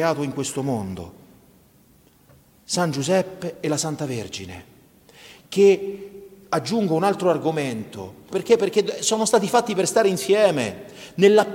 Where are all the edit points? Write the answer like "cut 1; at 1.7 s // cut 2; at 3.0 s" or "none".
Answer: cut 1; at 8.3 s